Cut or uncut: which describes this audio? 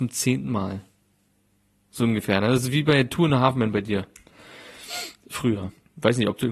uncut